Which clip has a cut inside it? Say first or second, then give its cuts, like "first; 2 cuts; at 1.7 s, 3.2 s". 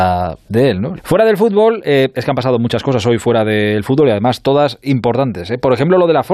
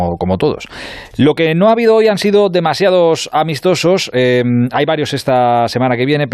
first; 1 cut; at 1.0 s